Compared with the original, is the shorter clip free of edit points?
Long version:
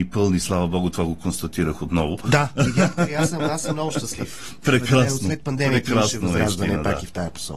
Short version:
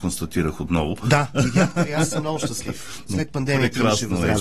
no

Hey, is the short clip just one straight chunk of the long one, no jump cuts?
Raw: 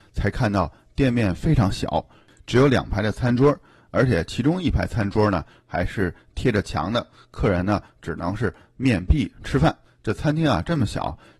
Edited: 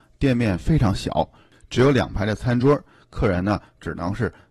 no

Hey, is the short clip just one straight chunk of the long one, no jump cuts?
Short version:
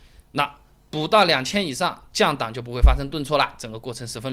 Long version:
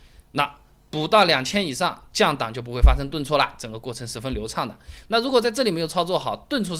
yes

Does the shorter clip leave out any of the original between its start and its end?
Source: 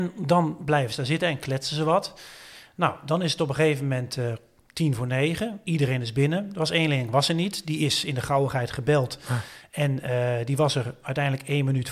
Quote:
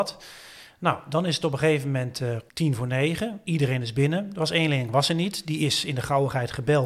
yes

